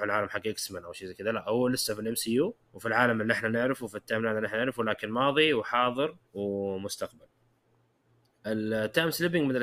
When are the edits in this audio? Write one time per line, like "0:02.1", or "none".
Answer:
0:02.6
0:06.3